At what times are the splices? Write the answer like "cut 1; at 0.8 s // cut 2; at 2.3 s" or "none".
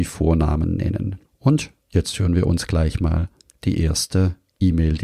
cut 1; at 1.2 s